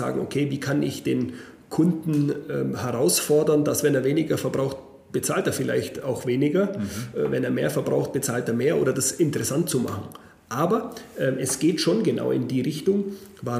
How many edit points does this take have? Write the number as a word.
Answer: zero